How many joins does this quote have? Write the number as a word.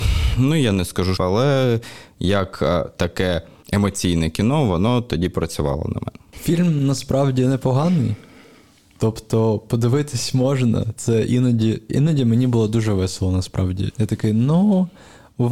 two